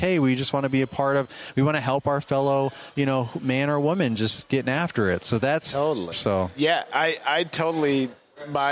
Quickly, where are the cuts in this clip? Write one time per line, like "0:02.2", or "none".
0:06.1